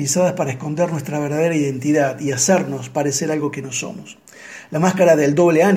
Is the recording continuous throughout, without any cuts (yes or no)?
yes